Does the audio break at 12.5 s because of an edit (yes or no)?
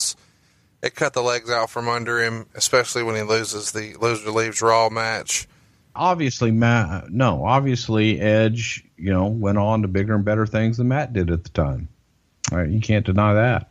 no